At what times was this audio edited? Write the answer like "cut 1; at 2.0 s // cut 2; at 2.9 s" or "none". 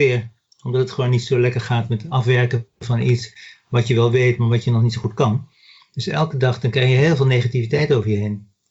cut 1; at 5.8 s